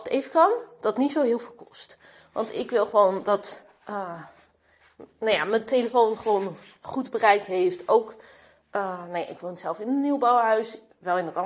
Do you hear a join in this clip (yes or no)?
no